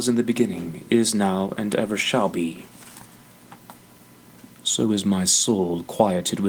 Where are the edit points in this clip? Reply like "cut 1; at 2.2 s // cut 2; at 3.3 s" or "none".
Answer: cut 1; at 4.5 s